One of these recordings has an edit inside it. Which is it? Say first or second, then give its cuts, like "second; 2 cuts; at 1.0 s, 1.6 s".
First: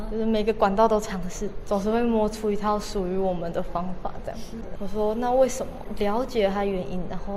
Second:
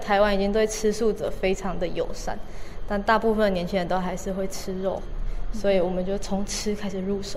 first; 2 cuts; at 1.6 s, 4.8 s